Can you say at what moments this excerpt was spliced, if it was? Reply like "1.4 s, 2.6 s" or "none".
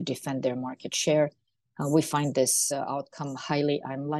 none